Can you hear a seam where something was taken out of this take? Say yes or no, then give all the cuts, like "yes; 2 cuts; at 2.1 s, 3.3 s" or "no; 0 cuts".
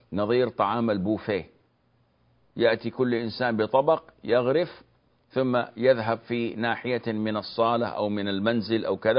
no; 0 cuts